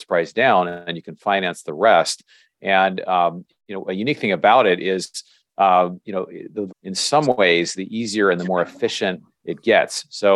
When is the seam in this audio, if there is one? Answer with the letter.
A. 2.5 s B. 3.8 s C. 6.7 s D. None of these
C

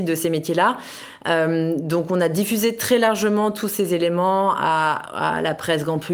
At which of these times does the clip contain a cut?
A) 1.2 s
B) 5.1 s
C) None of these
C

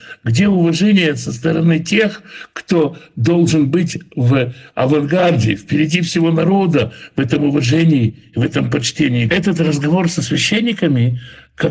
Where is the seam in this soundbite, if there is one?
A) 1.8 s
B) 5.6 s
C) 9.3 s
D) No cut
C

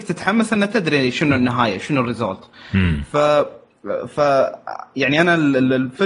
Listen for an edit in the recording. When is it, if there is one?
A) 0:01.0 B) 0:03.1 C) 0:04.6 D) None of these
D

